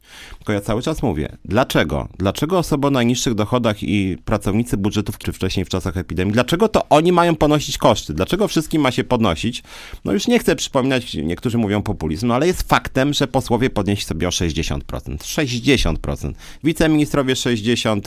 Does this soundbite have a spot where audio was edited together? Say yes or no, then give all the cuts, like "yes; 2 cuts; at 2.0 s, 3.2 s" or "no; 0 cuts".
yes; 1 cut; at 5.2 s